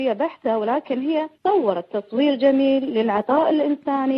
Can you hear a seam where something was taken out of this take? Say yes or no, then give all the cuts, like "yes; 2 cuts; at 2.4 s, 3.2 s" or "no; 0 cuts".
yes; 1 cut; at 1.3 s